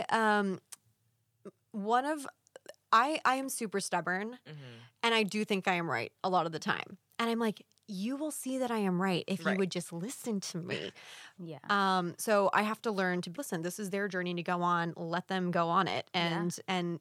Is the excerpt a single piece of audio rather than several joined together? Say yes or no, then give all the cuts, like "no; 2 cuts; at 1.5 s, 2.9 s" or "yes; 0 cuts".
no; 2 cuts; at 11.4 s, 13.3 s